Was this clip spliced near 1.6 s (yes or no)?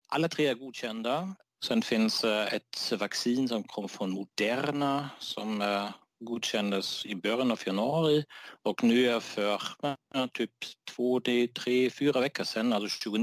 yes